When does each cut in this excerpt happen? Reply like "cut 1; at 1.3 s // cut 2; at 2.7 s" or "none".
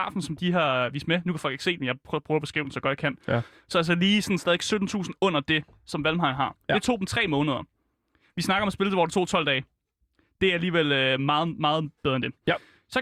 cut 1; at 3.5 s